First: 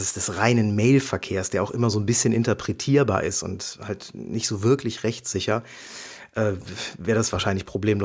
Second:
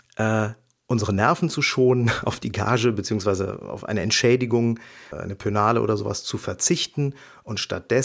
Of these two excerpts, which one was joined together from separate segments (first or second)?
second